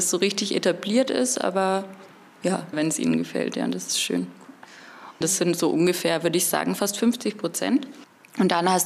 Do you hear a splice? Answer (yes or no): yes